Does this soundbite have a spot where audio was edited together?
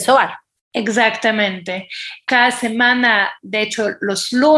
no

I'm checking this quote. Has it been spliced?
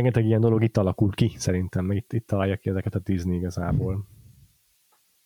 no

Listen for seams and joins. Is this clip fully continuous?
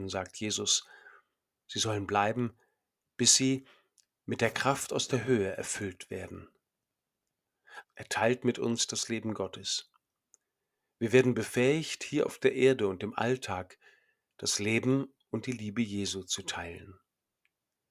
no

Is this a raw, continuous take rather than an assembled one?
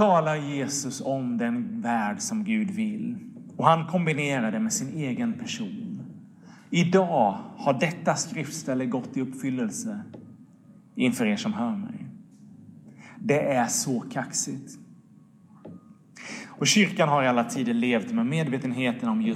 yes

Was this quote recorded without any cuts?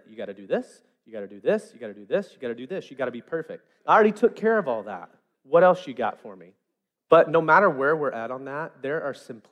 no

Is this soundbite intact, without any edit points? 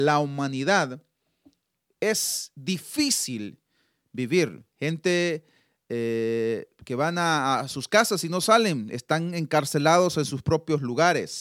yes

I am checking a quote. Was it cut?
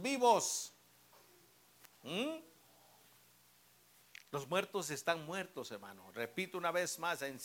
no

